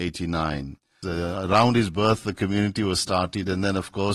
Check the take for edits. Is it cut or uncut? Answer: cut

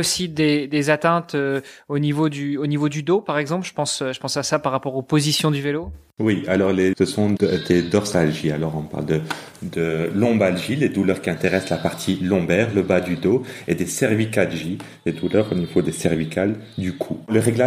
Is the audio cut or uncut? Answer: cut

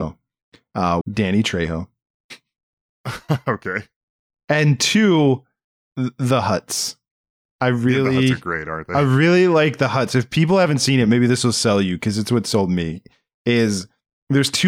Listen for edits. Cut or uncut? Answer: cut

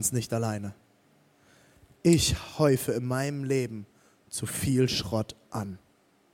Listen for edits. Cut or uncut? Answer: uncut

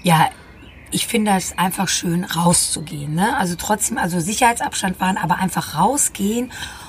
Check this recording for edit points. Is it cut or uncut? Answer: uncut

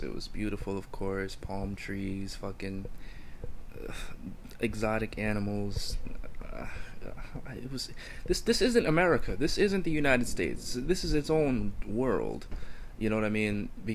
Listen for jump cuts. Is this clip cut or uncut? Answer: uncut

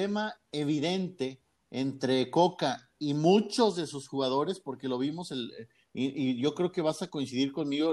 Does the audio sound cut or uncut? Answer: uncut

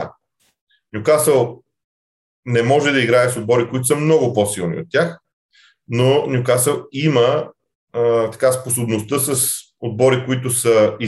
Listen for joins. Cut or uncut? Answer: uncut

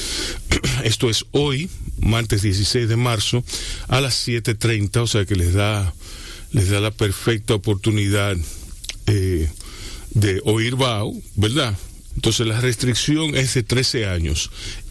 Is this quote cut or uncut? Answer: cut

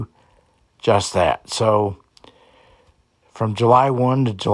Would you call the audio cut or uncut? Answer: uncut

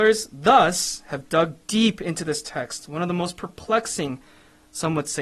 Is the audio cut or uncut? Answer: uncut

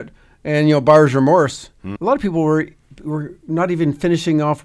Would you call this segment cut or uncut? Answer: cut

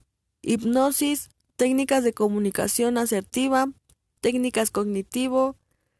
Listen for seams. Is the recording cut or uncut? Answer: uncut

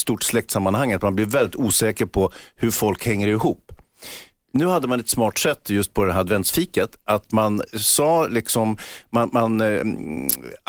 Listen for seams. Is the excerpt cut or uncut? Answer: uncut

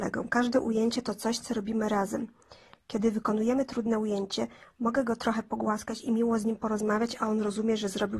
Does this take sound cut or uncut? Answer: uncut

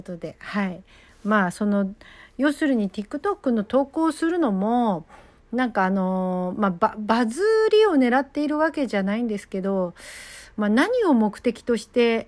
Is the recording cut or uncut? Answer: uncut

